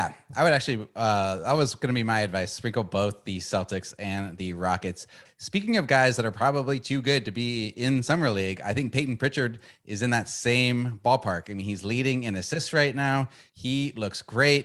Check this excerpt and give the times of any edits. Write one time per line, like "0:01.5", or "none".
0:05.2